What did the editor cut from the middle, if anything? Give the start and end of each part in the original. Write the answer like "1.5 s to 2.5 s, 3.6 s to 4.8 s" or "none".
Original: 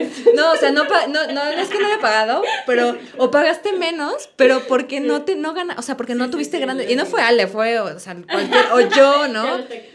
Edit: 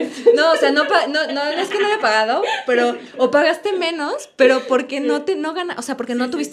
none